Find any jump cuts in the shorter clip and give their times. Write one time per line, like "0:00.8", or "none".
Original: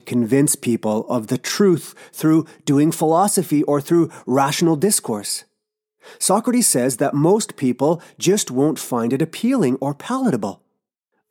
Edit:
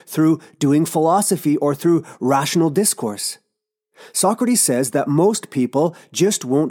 none